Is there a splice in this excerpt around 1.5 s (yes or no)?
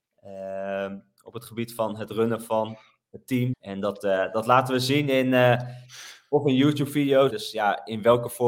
no